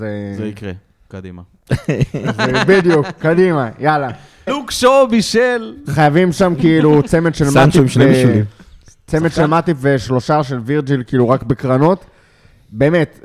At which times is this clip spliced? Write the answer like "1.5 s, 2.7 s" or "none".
4.5 s